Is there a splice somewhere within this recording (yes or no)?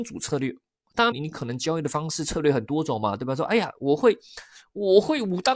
yes